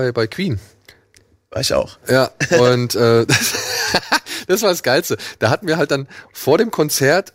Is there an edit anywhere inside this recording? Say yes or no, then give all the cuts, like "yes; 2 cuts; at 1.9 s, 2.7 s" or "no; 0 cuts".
no; 0 cuts